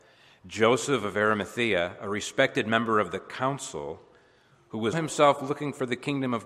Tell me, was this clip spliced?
yes; 1 cut; at 4.9 s

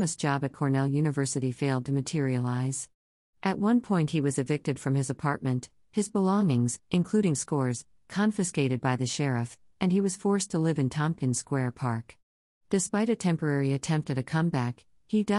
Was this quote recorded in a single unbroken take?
yes; 0 cuts

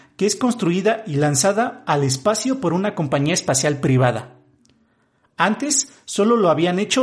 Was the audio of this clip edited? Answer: no; 0 cuts

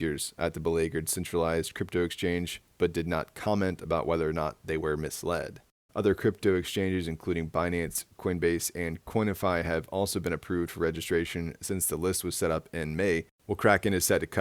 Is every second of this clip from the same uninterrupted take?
no; 2 cuts; at 5.9 s, 13.3 s

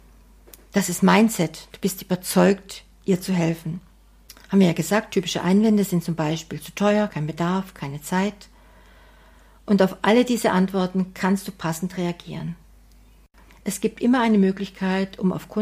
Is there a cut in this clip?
no; 0 cuts

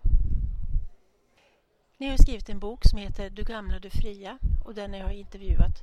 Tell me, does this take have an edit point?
no; 0 cuts

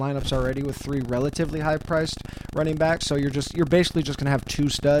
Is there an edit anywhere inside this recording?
no; 0 cuts

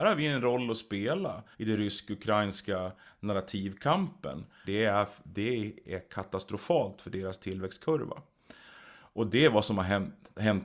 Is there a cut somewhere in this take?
yes; 2 cuts; at 1.5 s, 4.6 s

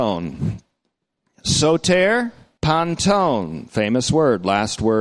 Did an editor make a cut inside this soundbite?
yes; 1 cut; at 2.6 s

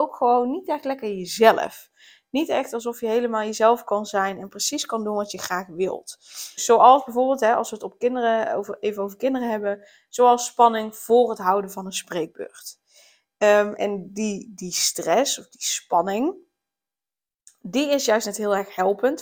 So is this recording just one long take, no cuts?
no; 2 cuts; at 6.6 s, 13.8 s

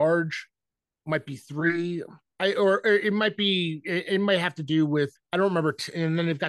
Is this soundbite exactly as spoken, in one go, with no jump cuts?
no; 1 cut; at 5.2 s

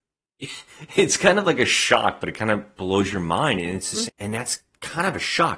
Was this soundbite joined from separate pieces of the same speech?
yes; 1 cut; at 4.1 s

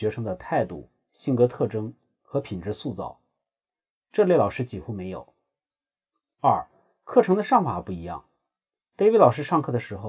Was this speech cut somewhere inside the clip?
no; 0 cuts

